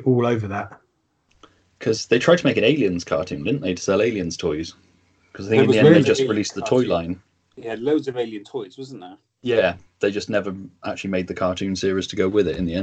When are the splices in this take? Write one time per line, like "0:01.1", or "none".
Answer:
none